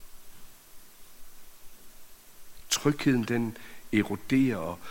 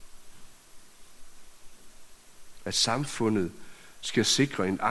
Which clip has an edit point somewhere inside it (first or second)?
second